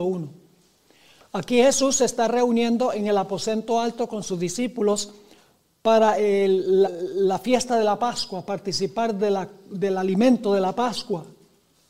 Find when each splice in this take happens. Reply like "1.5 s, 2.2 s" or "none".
6.8 s

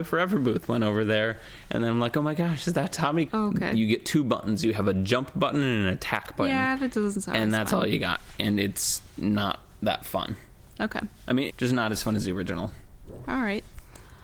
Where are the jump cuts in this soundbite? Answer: 3.3 s, 11.5 s

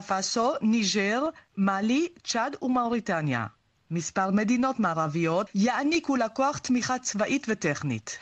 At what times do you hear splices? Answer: 5.5 s

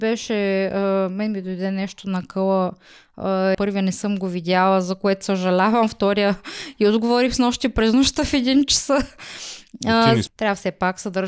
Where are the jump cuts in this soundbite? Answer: 3.5 s, 10.3 s

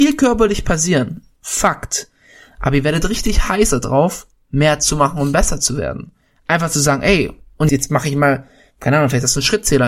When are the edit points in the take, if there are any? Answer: 7.7 s

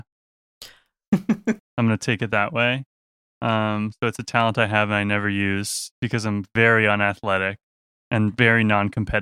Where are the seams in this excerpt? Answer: 1.6 s

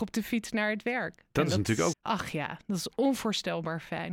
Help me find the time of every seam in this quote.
1.9 s

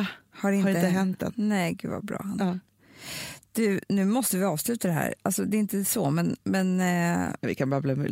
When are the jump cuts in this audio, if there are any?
none

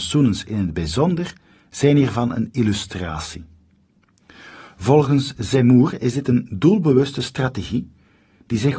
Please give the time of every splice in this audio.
none

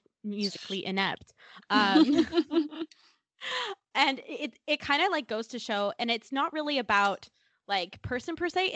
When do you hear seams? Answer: none

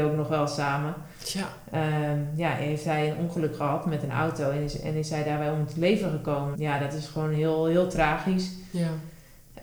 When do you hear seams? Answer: 6.5 s

